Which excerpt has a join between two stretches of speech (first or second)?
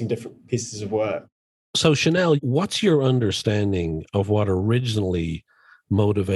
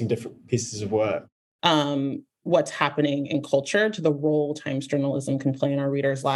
second